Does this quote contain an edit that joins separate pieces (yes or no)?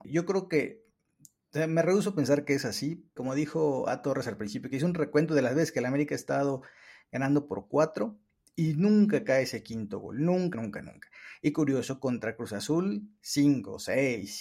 yes